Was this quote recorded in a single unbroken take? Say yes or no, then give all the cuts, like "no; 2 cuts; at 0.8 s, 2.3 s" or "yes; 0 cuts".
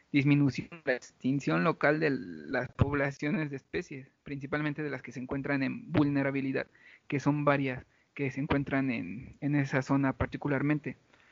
yes; 0 cuts